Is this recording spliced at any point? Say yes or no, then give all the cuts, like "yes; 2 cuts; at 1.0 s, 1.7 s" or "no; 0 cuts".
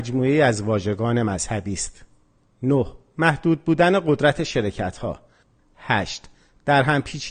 yes; 1 cut; at 5.6 s